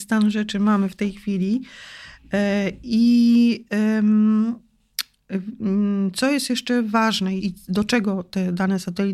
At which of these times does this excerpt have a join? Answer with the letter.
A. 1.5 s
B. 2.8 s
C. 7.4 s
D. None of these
C